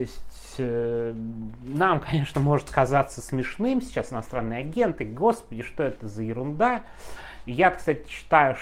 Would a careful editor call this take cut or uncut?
uncut